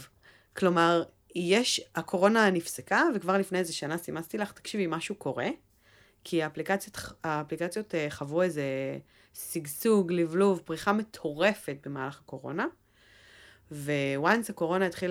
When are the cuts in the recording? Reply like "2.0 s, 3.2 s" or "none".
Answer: none